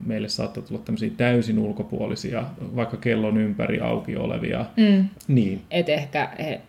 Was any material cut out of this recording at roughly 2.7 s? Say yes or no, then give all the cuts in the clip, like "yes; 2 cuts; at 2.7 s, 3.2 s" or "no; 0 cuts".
no; 1 cut; at 5.1 s